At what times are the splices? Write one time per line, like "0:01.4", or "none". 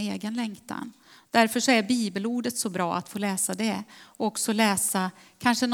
none